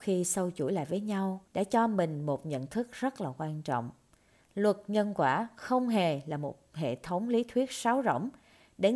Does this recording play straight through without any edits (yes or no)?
no